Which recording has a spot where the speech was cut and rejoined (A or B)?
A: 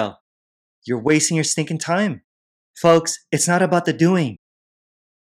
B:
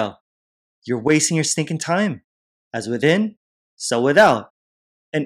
B